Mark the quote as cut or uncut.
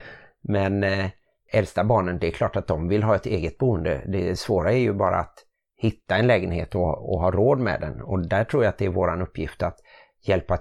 uncut